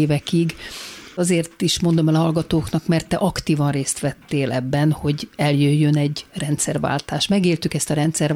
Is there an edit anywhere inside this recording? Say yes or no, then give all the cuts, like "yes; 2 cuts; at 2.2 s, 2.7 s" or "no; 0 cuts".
no; 0 cuts